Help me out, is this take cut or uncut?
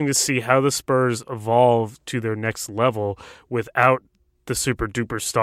uncut